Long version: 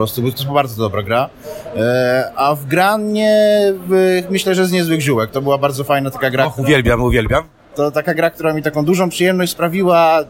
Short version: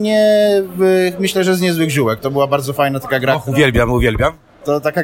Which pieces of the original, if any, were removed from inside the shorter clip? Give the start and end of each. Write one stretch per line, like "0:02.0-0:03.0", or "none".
none